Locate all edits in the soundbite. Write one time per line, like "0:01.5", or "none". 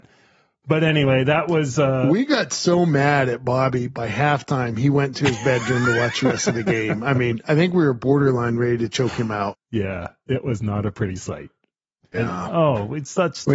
0:09.5
0:12.1